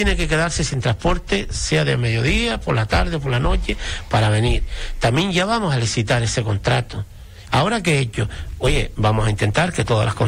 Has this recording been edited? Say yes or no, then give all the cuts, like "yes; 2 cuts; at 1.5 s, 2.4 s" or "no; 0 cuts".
yes; 1 cut; at 7.5 s